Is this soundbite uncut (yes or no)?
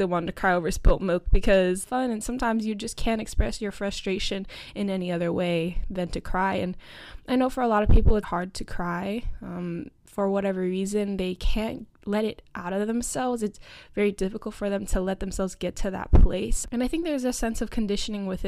no